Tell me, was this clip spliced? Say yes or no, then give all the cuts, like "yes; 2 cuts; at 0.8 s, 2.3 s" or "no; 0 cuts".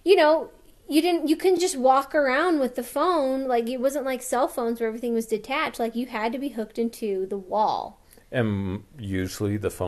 no; 0 cuts